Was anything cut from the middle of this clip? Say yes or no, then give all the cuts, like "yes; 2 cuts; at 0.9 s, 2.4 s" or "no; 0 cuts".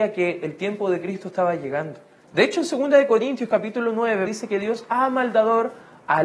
yes; 2 cuts; at 2.2 s, 4.3 s